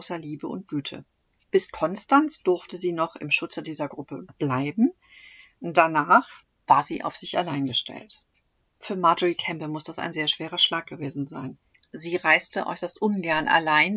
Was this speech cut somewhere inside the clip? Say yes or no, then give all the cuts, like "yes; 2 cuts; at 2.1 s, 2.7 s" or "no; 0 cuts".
no; 0 cuts